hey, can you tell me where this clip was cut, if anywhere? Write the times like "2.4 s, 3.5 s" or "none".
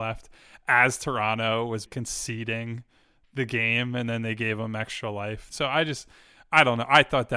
1.9 s, 5.5 s

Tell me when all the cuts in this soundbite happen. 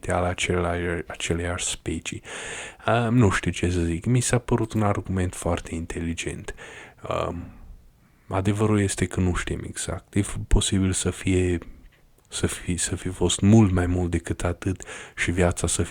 none

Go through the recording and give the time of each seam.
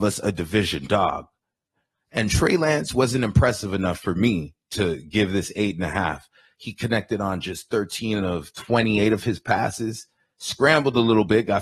none

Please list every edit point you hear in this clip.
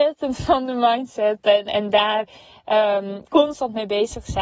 1.7 s, 3.3 s

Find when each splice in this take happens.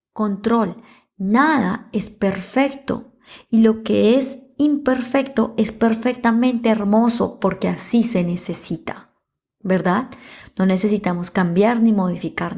10.4 s

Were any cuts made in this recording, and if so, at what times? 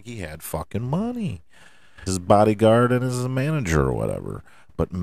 2.1 s

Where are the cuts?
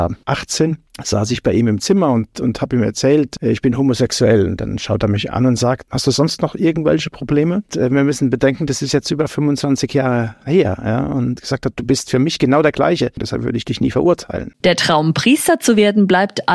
none

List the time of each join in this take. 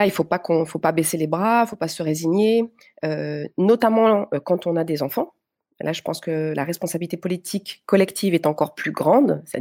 none

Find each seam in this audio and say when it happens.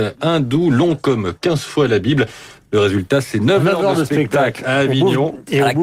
none

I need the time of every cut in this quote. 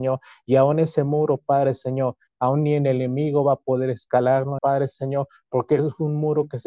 4.6 s

